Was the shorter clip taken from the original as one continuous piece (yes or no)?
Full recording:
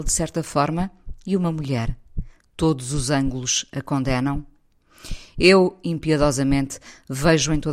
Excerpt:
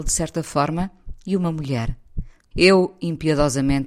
no